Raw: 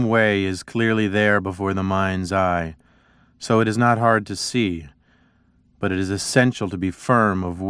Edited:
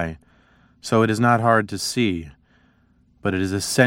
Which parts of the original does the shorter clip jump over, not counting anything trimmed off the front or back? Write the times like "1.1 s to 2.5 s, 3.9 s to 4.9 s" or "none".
none